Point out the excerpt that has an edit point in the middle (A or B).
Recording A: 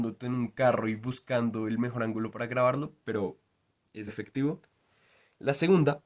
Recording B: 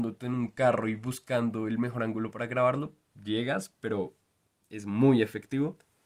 A